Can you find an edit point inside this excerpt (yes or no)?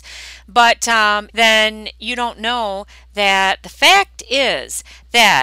yes